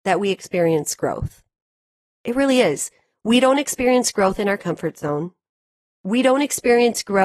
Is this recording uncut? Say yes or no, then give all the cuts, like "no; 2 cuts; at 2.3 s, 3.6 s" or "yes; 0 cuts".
yes; 0 cuts